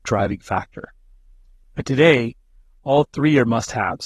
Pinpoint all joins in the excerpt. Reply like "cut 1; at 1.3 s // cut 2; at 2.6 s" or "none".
cut 1; at 1.6 s